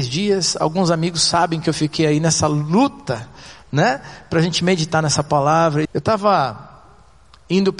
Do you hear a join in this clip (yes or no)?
yes